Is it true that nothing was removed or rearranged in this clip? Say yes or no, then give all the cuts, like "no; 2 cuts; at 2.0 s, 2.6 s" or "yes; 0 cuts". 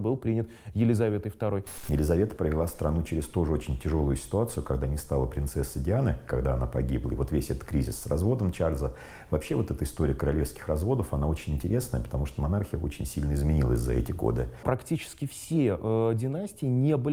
yes; 0 cuts